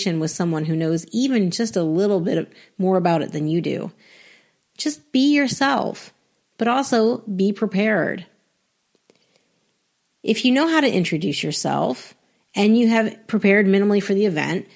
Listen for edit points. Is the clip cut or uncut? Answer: uncut